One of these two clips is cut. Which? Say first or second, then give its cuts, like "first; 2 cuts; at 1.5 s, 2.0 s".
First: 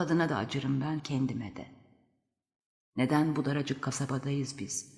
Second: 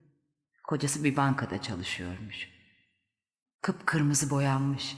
first; 1 cut; at 1.0 s